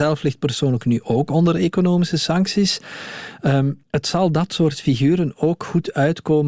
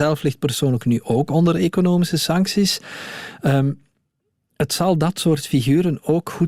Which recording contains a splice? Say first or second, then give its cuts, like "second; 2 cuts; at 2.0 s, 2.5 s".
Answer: first; 1 cut; at 3.8 s